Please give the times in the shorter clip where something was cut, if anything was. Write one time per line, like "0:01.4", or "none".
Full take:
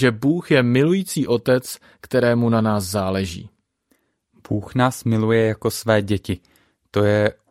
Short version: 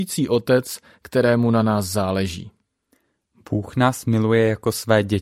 none